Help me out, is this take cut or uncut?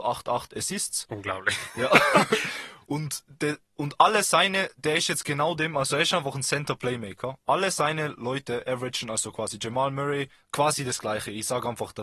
uncut